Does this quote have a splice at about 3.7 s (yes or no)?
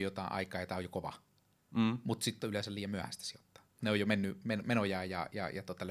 yes